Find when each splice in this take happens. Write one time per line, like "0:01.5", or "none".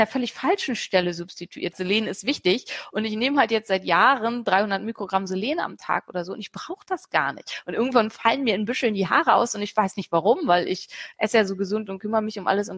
0:01.7